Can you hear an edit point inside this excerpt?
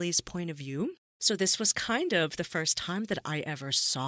no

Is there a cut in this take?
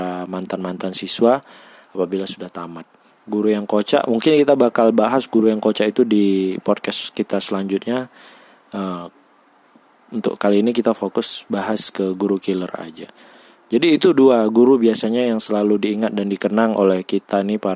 yes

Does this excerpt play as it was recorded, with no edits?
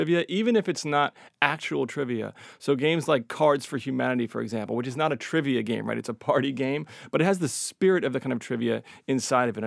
yes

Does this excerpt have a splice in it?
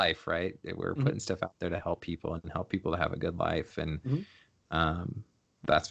no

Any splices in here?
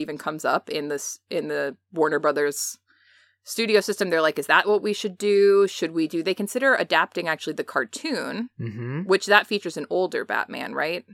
no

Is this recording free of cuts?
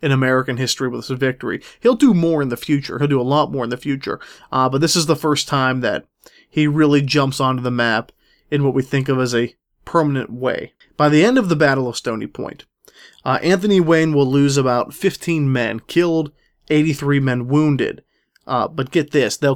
yes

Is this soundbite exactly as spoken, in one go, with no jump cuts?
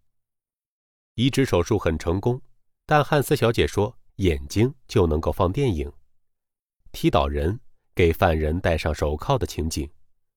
no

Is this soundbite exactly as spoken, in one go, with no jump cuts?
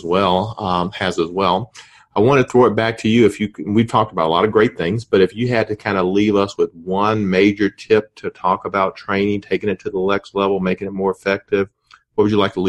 yes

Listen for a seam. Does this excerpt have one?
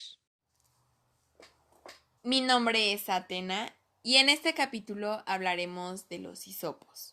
yes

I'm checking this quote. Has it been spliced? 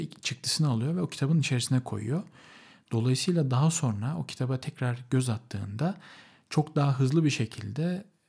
no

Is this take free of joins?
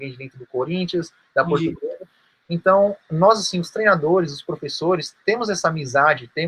yes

